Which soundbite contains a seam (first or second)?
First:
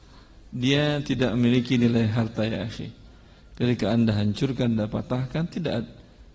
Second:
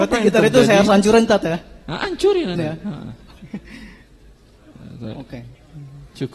second